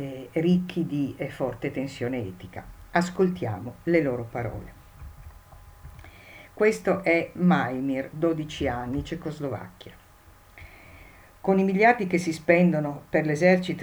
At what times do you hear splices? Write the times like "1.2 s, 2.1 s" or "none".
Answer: none